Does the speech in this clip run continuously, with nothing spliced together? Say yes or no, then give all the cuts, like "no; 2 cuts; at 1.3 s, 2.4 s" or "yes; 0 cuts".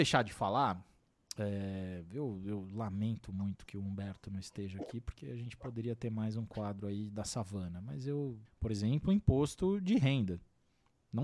no; 1 cut; at 8.5 s